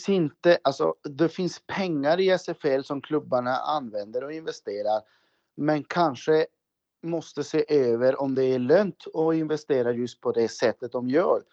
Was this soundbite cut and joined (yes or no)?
no